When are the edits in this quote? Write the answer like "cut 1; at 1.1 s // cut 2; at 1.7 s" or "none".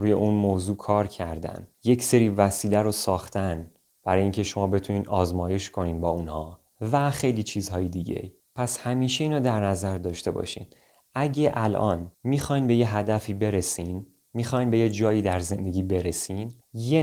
cut 1; at 12.1 s